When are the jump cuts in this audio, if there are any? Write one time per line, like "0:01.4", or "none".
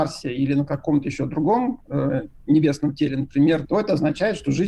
0:01.8
0:03.6